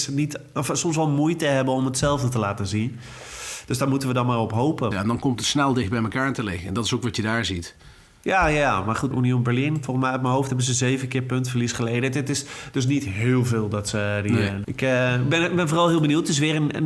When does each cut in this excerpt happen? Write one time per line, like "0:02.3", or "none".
0:04.9
0:09.1
0:14.6